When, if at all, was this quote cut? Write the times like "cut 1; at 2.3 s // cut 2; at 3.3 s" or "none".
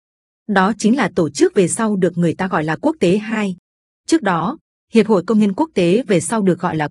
cut 1; at 3.9 s